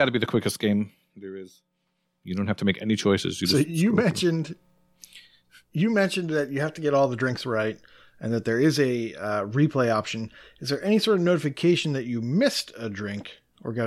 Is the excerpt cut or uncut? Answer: uncut